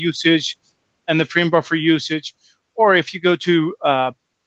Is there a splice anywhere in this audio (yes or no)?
yes